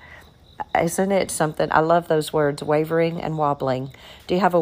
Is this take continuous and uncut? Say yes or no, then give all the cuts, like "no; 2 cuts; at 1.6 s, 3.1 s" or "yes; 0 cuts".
yes; 0 cuts